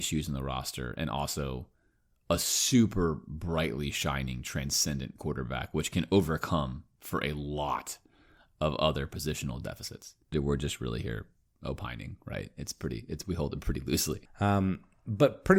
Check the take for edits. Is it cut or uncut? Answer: cut